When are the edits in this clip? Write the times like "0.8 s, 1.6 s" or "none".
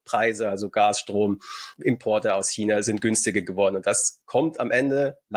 1.8 s